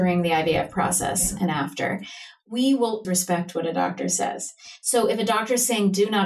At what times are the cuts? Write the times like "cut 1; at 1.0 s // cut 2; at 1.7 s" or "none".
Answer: cut 1; at 3.0 s